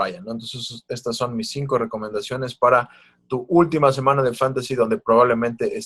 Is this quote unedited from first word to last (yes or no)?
yes